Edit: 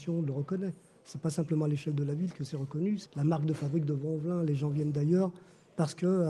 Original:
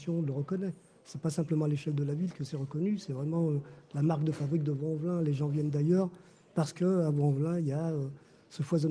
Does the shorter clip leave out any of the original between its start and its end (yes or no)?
yes